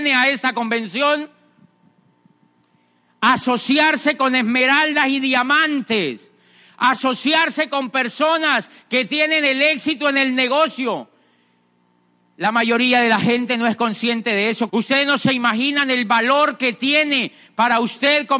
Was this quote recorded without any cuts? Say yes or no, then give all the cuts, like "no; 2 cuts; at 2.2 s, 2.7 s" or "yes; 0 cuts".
no; 1 cut; at 14.7 s